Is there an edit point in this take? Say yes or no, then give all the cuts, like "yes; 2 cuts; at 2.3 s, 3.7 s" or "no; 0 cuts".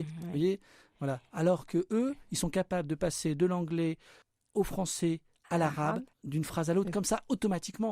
yes; 1 cut; at 6.1 s